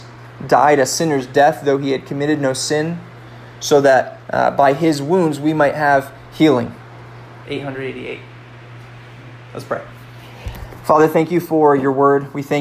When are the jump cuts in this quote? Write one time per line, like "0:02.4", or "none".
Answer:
0:07.4